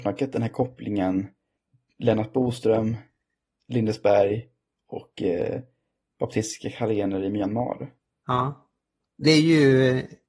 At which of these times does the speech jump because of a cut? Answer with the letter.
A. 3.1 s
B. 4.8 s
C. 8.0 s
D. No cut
D